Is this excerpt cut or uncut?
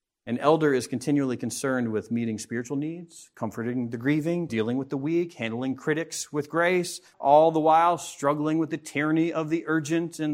cut